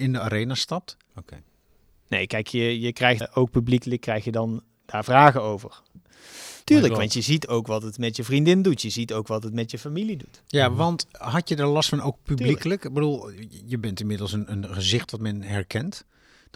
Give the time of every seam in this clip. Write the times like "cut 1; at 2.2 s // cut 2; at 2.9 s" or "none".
cut 1; at 1.1 s // cut 2; at 3.2 s // cut 3; at 6.6 s